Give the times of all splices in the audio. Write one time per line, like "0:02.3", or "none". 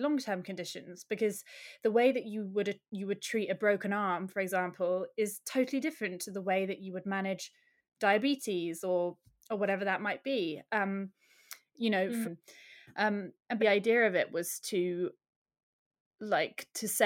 0:12.2
0:13.6